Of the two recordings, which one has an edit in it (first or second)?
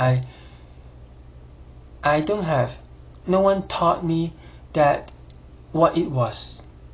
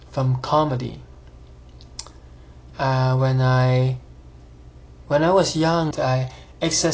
second